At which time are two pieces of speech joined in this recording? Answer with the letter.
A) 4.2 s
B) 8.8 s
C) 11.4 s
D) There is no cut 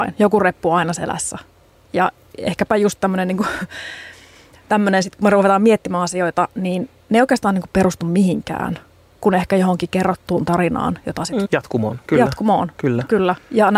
C